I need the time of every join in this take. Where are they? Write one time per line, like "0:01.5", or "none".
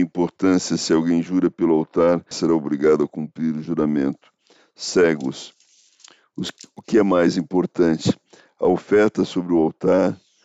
0:02.3